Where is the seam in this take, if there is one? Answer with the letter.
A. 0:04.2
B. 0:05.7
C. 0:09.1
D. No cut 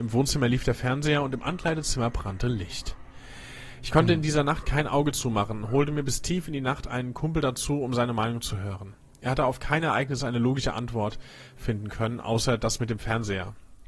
D